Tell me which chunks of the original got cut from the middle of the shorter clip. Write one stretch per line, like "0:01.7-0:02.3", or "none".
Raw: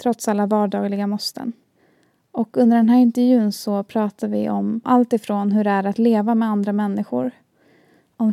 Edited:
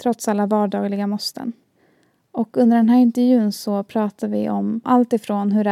none